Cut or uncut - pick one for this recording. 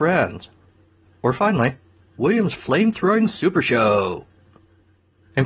uncut